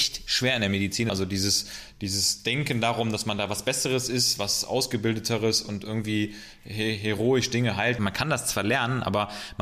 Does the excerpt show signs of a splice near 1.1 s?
yes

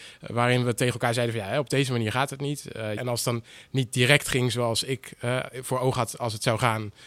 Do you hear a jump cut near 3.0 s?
yes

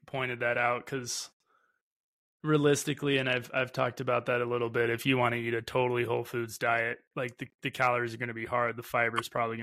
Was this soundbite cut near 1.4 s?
no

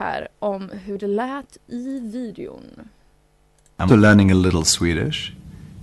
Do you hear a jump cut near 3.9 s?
yes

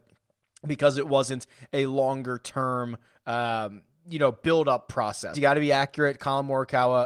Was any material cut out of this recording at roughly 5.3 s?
yes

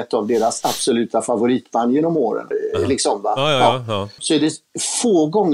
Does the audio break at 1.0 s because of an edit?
no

